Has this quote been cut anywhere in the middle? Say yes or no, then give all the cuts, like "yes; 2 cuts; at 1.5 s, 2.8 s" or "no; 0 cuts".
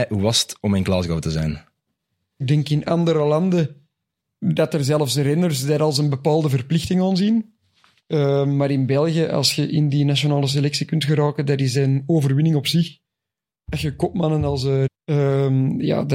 yes; 2 cuts; at 2.4 s, 14.9 s